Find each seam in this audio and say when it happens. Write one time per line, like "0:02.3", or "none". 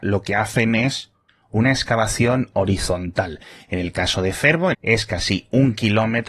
0:04.7